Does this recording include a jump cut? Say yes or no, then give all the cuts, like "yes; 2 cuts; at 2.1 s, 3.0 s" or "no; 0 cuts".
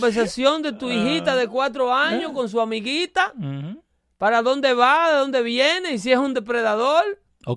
no; 0 cuts